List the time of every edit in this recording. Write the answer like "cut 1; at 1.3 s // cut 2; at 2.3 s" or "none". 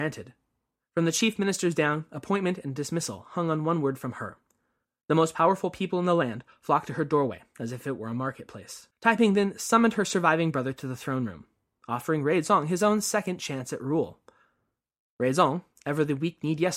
cut 1; at 8.9 s